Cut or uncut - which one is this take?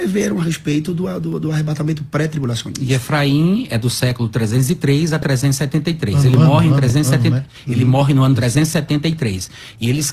uncut